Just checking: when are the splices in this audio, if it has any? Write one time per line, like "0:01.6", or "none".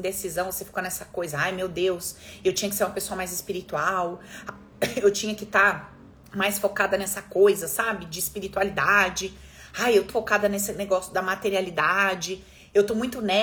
0:10.1